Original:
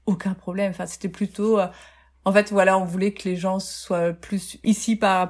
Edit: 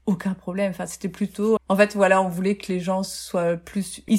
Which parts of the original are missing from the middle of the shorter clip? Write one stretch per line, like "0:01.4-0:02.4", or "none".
0:01.6-0:02.1